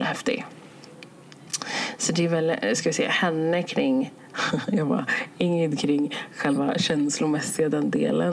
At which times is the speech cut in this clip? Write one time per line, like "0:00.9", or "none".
none